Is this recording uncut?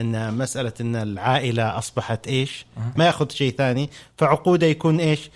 no; 1 cut; at 3.0 s

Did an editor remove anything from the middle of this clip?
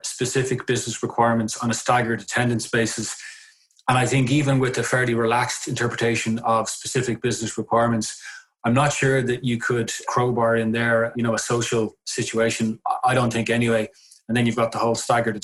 no; 0 cuts

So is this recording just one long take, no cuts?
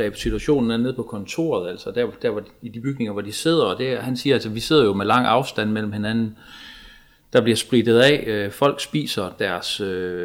yes; 0 cuts

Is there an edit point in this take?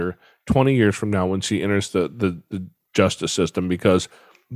no; 0 cuts

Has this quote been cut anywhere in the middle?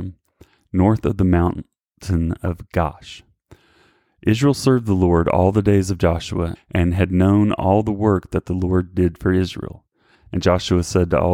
yes; 2 cuts; at 6.6 s, 10.1 s

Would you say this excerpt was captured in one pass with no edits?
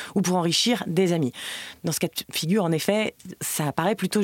yes; 0 cuts

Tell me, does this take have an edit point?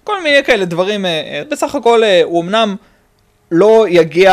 yes; 1 cut; at 1.4 s

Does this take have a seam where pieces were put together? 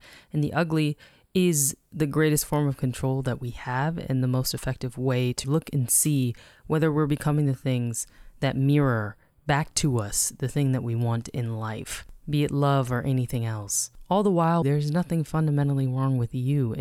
yes; 2 cuts; at 5.4 s, 14.6 s

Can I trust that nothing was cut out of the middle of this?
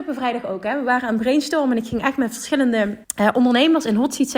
no; 1 cut; at 3.0 s

